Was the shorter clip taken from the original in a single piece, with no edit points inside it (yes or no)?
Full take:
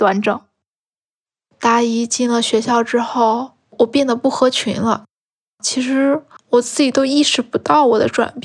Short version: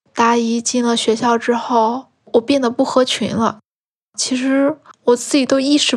yes